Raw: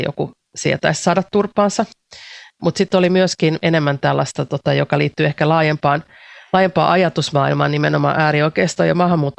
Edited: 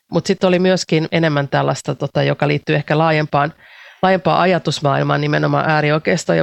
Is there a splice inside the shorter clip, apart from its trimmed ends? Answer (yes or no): no